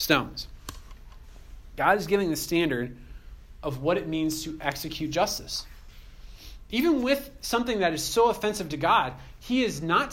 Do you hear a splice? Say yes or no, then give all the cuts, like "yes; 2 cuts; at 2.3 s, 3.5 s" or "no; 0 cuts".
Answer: no; 0 cuts